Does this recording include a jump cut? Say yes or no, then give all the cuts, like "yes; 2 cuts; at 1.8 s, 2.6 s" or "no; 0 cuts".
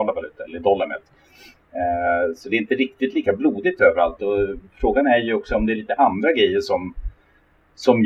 no; 0 cuts